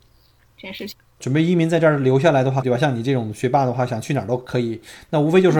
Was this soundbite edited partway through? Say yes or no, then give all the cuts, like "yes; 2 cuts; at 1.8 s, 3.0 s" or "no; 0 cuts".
yes; 2 cuts; at 1.2 s, 2.6 s